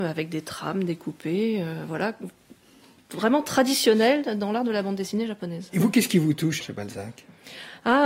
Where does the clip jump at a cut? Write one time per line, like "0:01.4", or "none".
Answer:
0:06.6

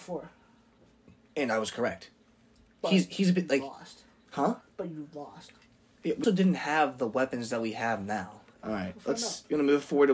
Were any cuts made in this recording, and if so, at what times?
0:06.2
0:08.5

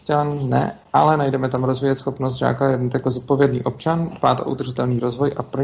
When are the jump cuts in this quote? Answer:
none

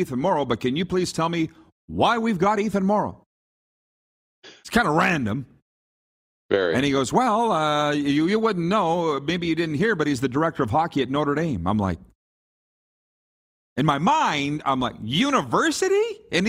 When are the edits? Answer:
none

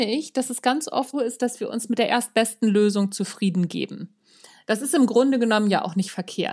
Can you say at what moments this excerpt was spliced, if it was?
0:01.1

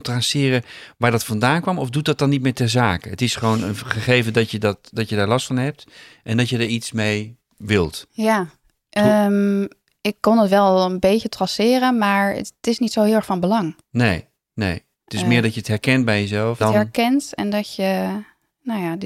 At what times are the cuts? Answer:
0:16.6

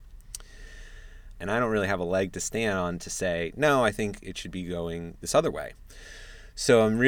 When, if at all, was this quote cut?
0:01.4

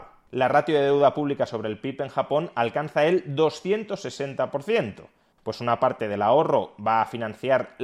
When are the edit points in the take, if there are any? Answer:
0:05.4

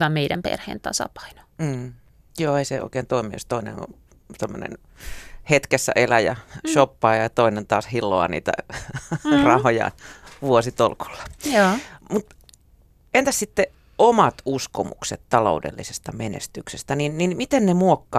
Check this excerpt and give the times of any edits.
none

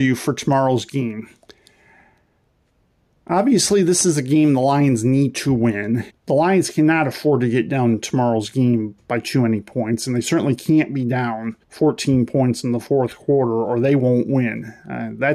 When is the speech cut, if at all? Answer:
0:06.1
0:11.6

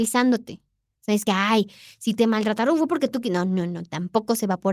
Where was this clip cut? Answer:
none

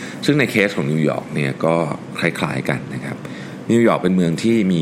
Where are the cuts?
none

